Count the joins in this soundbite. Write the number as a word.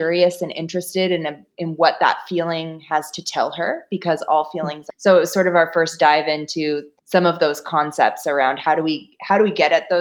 two